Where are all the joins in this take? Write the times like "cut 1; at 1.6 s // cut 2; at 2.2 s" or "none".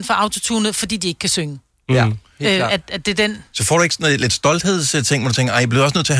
none

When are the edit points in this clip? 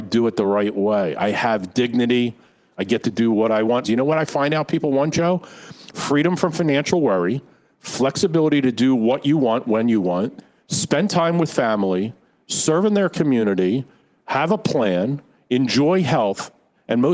cut 1; at 3.8 s

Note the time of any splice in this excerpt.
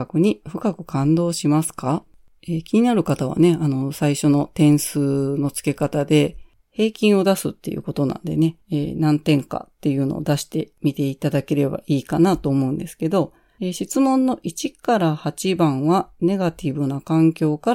cut 1; at 8.6 s

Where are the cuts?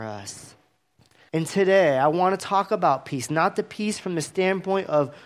cut 1; at 1.3 s

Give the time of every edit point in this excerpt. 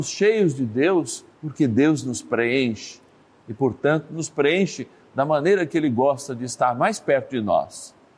cut 1; at 1.3 s

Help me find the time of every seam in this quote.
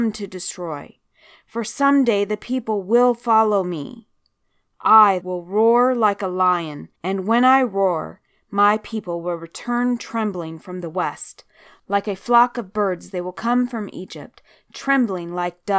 cut 1; at 5.2 s // cut 2; at 7.0 s

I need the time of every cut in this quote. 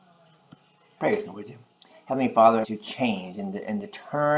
cut 1; at 1.0 s // cut 2; at 2.6 s

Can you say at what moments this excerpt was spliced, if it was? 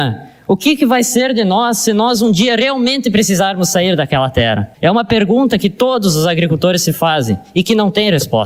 none

